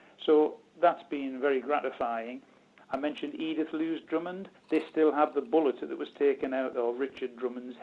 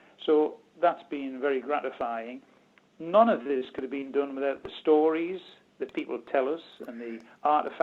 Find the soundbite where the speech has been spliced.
first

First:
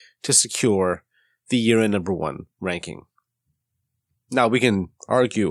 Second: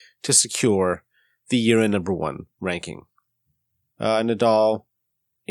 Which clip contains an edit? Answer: second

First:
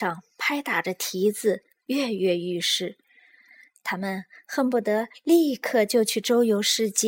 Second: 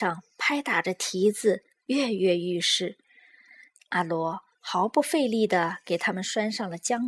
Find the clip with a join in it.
second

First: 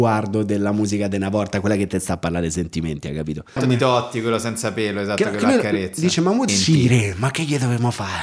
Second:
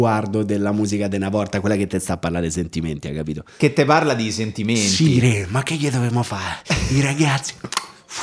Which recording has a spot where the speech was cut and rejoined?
first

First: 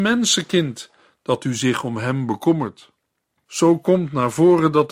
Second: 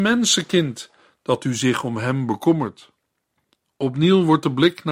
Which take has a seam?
first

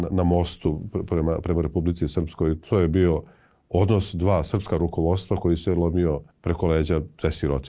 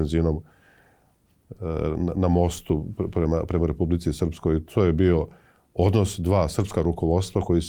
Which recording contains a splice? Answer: first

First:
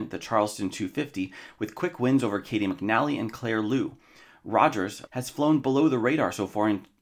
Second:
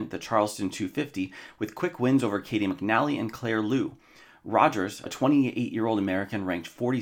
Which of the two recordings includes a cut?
first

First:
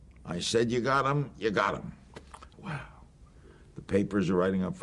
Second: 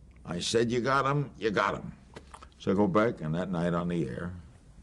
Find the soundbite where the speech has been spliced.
first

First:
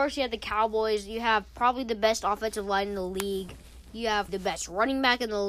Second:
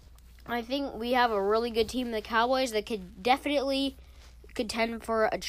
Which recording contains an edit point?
first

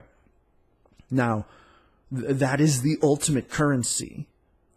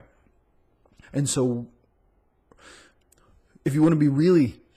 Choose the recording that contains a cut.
second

